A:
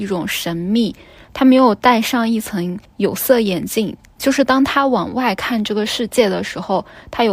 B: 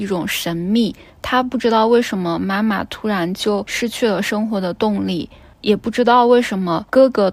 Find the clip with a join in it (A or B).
B